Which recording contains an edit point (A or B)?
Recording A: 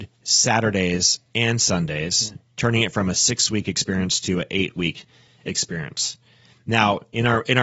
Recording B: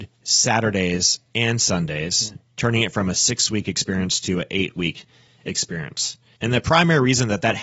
B